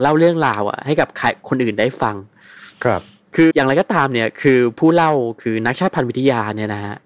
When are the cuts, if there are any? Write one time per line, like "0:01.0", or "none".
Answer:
0:03.5